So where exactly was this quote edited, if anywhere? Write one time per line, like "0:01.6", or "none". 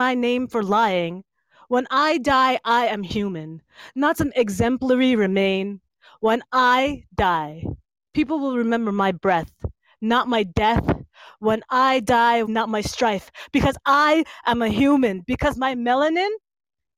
0:12.5
0:15.2